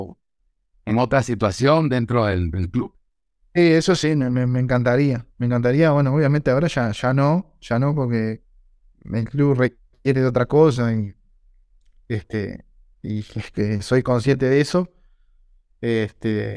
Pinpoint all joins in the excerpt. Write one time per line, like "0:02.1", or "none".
none